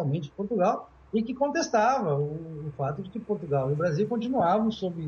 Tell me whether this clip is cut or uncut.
uncut